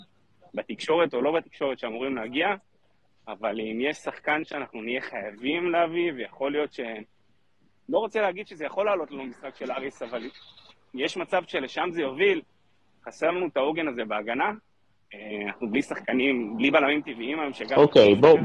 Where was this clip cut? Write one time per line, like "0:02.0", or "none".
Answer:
none